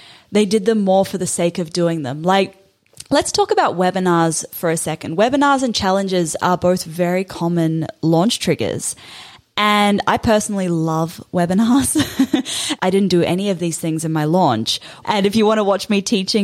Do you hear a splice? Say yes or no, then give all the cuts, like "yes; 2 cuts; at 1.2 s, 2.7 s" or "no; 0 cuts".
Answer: yes; 2 cuts; at 12.8 s, 15.0 s